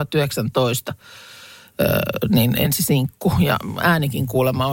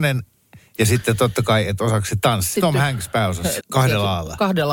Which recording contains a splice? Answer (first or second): second